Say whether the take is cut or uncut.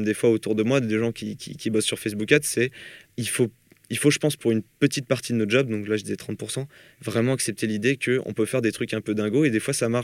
cut